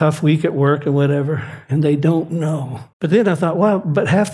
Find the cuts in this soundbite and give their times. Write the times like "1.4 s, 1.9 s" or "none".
2.9 s